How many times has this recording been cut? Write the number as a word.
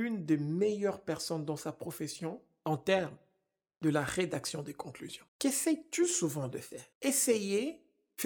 two